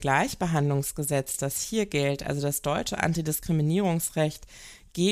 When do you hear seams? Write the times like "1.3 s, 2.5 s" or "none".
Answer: none

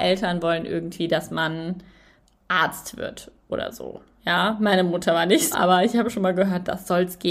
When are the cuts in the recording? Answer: 5.5 s

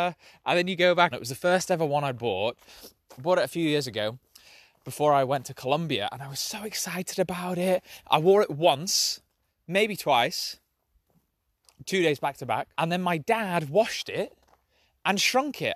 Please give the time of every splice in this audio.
1.1 s, 12.7 s

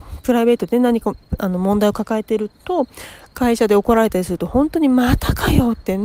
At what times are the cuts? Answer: 1.2 s

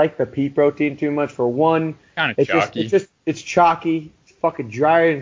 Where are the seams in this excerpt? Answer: none

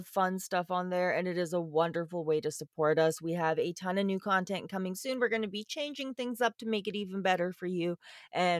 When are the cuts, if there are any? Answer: none

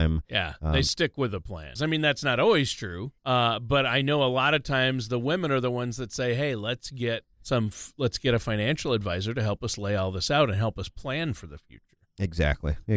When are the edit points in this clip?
1.8 s, 3.2 s, 7.3 s

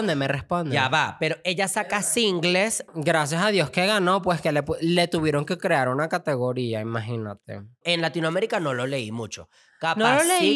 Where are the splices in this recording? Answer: 7.8 s

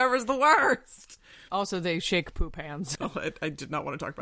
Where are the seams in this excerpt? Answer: 1.5 s, 2.9 s

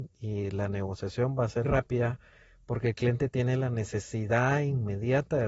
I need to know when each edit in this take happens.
1.6 s

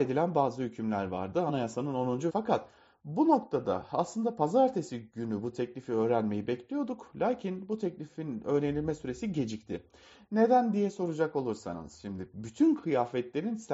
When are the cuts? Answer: 2.3 s

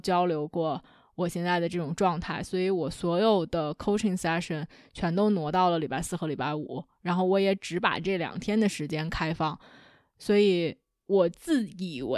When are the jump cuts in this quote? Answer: 11.1 s

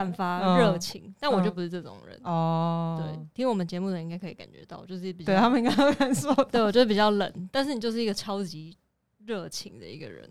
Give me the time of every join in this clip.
none

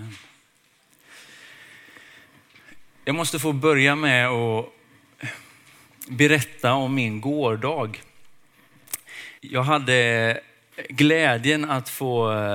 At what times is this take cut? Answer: 9.4 s

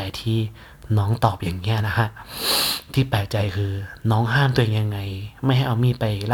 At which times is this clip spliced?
none

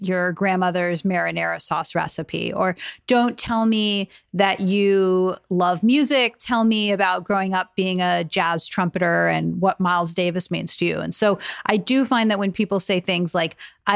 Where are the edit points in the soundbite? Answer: none

